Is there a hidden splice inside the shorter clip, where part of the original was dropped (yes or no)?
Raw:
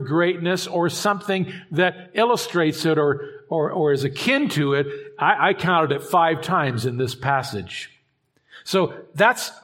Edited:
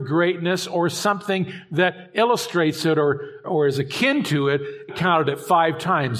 yes